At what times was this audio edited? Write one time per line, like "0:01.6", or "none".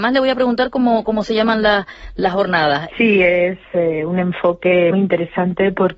0:02.9
0:04.9